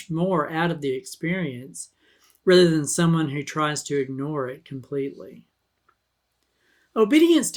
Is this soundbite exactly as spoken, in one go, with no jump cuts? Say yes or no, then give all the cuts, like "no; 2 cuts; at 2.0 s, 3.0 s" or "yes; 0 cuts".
yes; 0 cuts